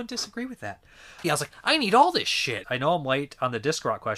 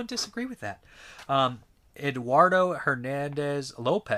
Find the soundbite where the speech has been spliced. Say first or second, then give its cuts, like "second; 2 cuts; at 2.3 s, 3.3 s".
first; 2 cuts; at 1.2 s, 2.6 s